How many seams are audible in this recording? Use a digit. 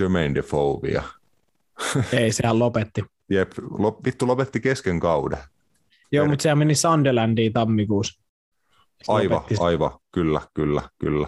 0